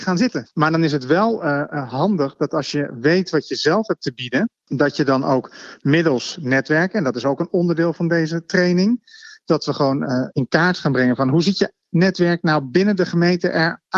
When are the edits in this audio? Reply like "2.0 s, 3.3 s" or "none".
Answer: 10.0 s